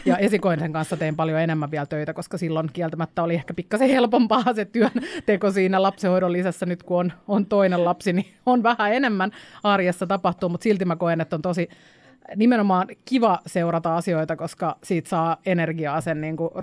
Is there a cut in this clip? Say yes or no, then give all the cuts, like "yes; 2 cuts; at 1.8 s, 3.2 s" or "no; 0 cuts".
no; 0 cuts